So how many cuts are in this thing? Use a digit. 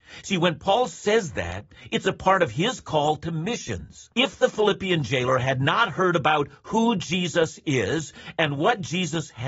1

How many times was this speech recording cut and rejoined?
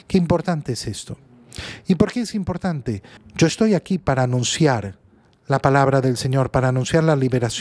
1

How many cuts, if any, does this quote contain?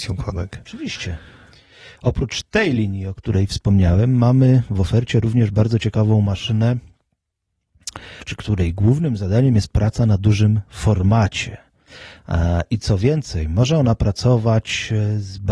1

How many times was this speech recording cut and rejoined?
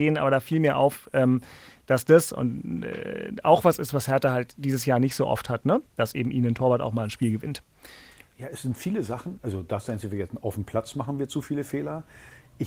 0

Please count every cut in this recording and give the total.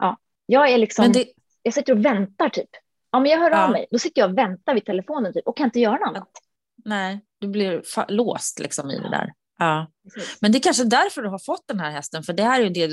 0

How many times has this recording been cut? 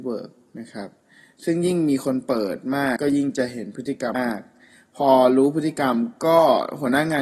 2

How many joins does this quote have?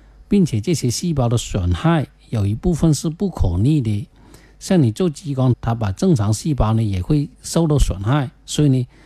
1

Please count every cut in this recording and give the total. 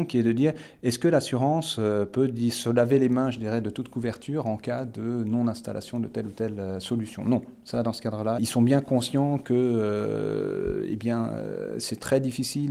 1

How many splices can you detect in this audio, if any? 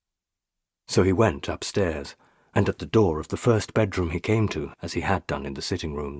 1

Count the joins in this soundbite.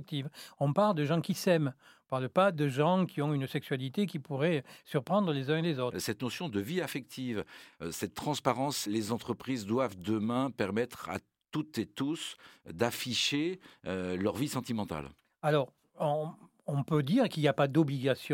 1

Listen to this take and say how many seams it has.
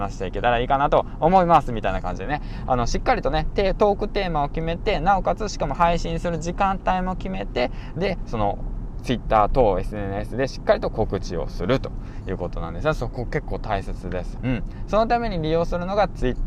1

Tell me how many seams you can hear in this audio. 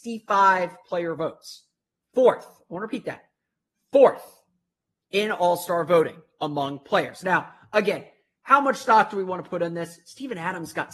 0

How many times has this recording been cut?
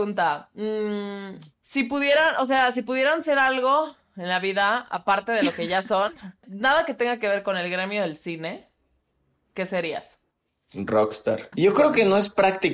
2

